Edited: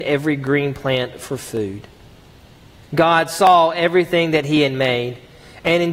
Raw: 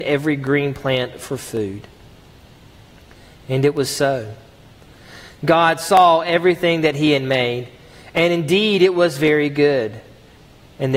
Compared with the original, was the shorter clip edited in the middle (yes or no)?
yes